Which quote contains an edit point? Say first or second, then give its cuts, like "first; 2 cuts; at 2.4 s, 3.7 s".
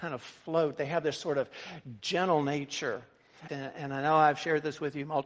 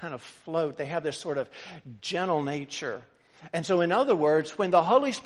first; 1 cut; at 3.5 s